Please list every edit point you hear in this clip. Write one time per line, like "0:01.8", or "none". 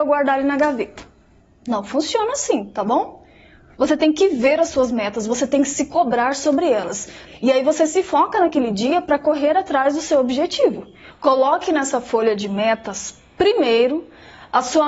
0:07.3
0:11.1